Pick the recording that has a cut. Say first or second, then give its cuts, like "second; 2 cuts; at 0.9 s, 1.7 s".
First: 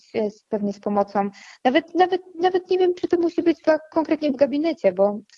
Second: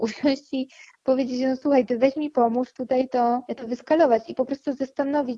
second; 1 cut; at 3.5 s